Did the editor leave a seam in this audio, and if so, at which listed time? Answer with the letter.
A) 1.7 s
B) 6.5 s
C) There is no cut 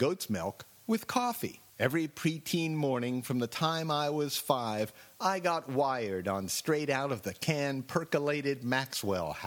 A